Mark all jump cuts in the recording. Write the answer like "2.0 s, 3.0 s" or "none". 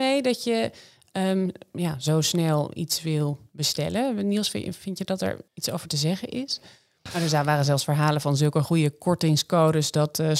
7.1 s